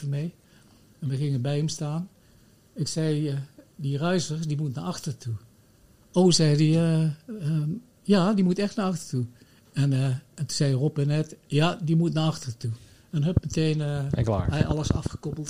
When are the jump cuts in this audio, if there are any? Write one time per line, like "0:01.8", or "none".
none